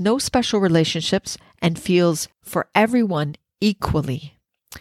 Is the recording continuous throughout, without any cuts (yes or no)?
no